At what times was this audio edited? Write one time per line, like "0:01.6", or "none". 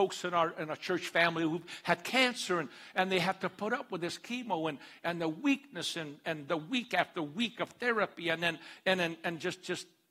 none